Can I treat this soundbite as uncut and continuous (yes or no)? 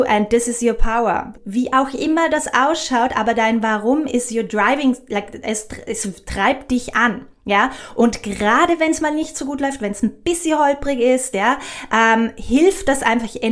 no